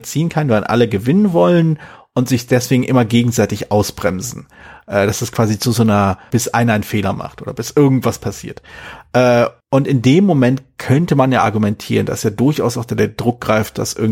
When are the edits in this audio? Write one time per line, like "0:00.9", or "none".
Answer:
0:06.3
0:09.6